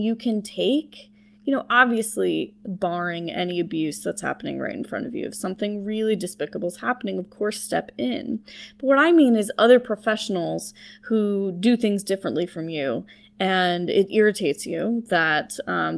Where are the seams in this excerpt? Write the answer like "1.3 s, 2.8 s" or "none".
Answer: none